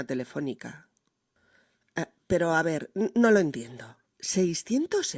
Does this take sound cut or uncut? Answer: uncut